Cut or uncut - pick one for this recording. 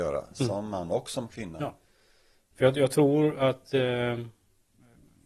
uncut